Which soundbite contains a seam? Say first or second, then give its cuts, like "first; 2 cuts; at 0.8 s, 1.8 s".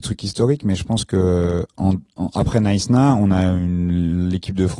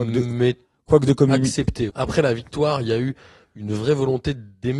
second; 1 cut; at 1.9 s